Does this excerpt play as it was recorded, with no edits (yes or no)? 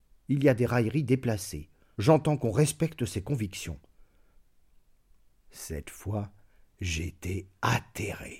no